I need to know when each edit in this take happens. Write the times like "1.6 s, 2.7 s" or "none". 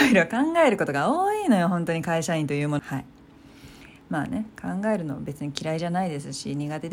2.8 s